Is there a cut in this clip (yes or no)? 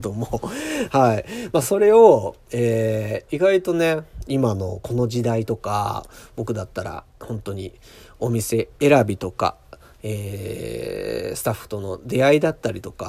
no